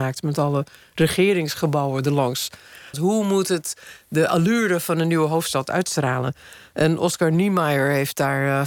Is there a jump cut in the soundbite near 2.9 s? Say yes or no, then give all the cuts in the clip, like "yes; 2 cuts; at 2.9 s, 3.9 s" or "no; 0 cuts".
yes; 1 cut; at 2.9 s